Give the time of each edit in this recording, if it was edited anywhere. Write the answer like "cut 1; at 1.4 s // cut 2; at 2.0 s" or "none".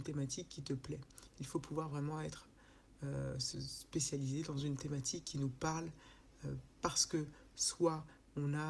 cut 1; at 3.5 s

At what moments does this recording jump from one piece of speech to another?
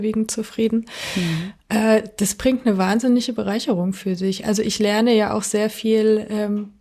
none

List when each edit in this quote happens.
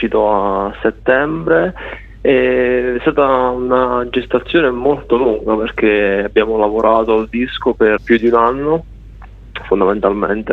cut 1; at 8.0 s

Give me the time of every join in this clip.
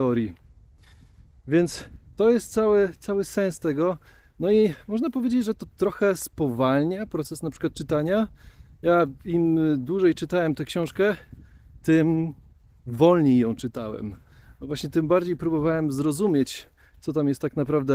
none

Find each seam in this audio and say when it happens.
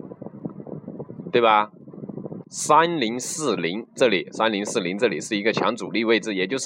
cut 1; at 2.4 s

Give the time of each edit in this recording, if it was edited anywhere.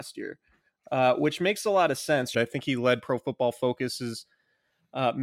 cut 1; at 2.3 s

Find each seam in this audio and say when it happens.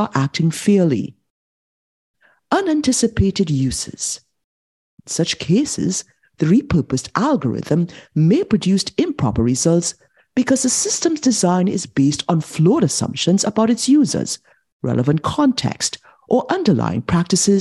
cut 1; at 4.9 s

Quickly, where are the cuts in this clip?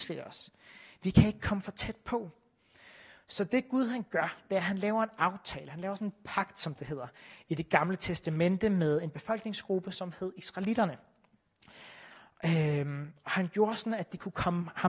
none

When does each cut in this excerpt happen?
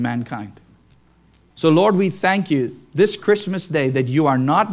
cut 1; at 1.5 s

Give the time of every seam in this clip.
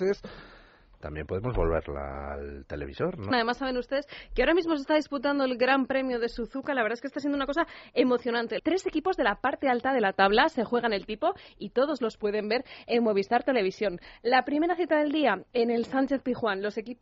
cut 1; at 3.3 s // cut 2; at 8.6 s

